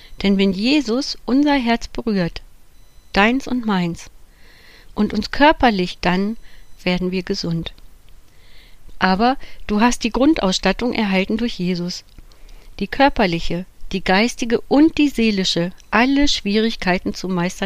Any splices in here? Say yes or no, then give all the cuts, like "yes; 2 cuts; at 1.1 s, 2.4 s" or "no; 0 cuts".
yes; 2 cuts; at 6.0 s, 8.9 s